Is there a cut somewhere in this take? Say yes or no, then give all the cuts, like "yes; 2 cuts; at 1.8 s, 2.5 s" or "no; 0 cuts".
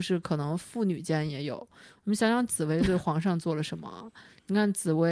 no; 0 cuts